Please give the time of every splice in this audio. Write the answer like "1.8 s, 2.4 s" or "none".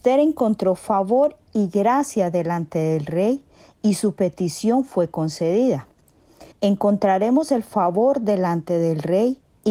6.5 s